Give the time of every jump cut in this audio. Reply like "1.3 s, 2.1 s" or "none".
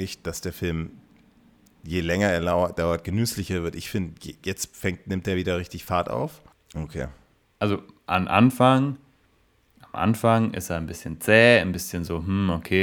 6.5 s